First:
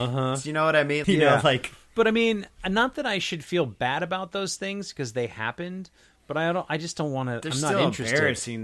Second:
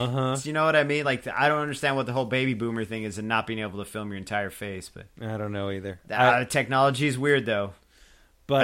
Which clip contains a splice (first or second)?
first